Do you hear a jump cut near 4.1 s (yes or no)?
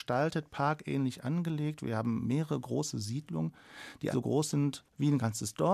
yes